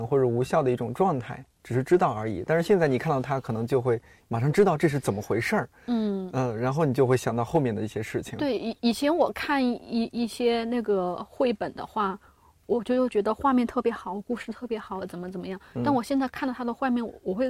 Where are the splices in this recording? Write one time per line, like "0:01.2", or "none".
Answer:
none